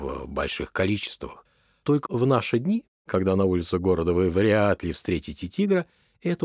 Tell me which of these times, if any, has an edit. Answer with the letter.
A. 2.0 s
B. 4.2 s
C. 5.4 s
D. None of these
A